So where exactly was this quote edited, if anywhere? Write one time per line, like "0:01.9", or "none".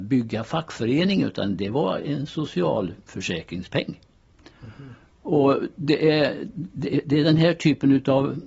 0:05.1